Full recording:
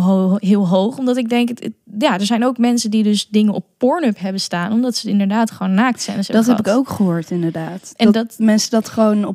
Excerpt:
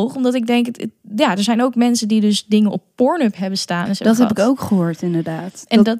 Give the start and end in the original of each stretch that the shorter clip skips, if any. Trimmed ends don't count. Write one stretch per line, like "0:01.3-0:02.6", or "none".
0:04.7-0:06.1